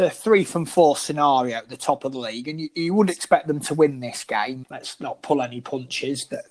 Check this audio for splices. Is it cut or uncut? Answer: cut